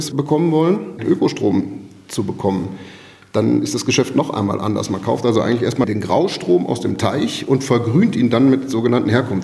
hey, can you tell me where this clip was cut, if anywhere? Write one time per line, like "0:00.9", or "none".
0:01.0